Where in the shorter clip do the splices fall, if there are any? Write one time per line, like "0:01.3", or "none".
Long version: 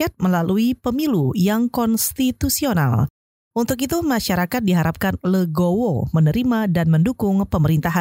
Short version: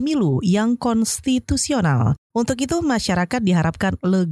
0:02.3